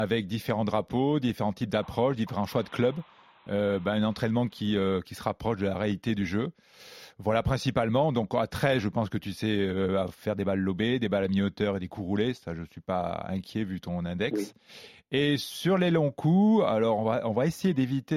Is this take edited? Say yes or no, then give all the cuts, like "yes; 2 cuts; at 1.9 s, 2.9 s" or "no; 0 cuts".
no; 0 cuts